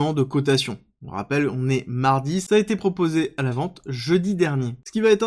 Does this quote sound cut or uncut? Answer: uncut